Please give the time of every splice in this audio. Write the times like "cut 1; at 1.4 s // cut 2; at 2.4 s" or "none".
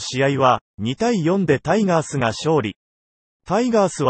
none